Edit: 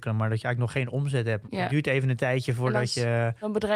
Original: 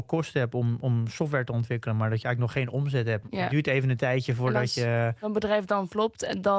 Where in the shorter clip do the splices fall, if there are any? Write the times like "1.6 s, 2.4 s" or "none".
none